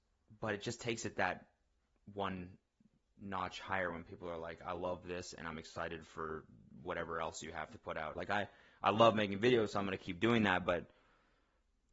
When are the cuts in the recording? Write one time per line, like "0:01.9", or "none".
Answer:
0:08.1